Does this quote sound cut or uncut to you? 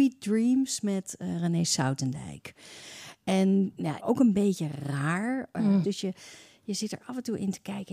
cut